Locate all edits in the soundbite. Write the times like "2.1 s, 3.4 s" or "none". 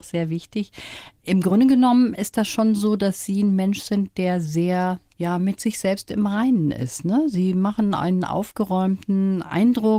none